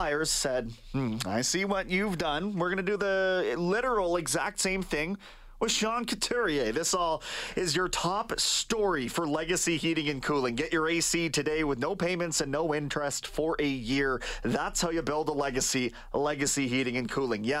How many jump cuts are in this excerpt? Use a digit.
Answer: 0